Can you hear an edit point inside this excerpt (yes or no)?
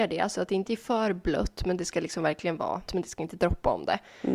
yes